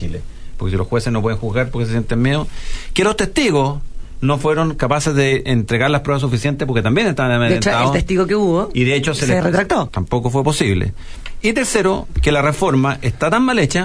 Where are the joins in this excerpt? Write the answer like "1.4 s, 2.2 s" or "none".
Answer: 9.9 s